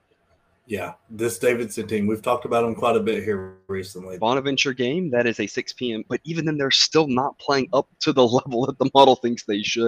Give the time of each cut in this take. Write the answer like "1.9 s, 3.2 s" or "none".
4.2 s, 6.1 s